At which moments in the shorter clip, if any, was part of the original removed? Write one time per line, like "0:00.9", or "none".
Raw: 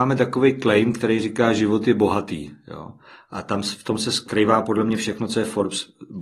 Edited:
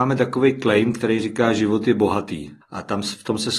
0:02.6